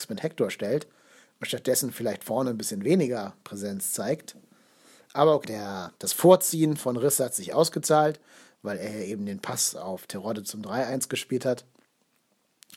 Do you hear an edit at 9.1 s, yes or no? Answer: no